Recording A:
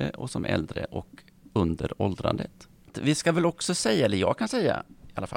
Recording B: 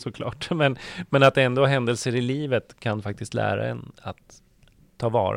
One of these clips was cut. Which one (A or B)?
A